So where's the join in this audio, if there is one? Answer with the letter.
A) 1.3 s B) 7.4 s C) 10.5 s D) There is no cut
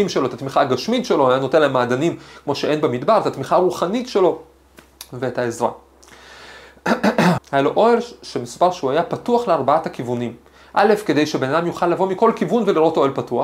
B